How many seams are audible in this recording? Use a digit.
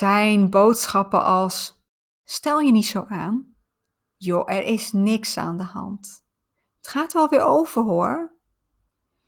0